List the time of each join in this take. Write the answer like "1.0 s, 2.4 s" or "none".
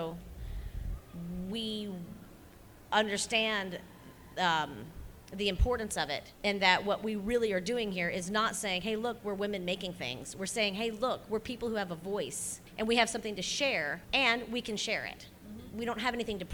6.3 s, 12.7 s, 14.0 s